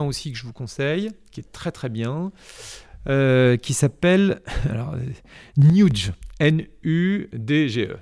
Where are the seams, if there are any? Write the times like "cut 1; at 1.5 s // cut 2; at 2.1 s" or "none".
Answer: none